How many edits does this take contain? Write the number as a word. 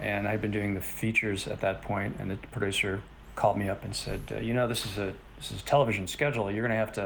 zero